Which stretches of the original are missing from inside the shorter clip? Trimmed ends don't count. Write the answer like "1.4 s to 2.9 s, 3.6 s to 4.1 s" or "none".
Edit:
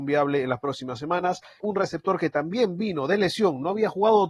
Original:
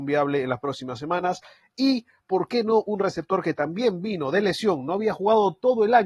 1.6 s to 2.8 s